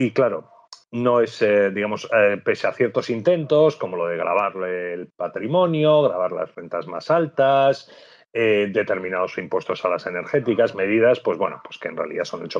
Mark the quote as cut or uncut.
uncut